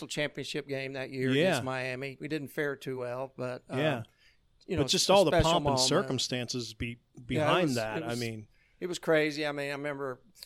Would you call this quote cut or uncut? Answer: uncut